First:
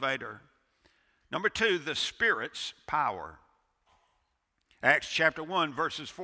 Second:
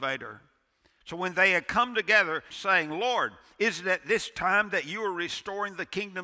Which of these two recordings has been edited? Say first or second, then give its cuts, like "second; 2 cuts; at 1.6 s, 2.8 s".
second; 2 cuts; at 1.0 s, 2.5 s